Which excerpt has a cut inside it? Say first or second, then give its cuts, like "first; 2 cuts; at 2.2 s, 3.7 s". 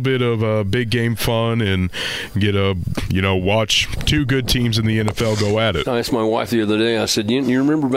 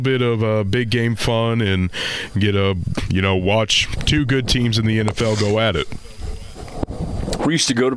first; 1 cut; at 5.8 s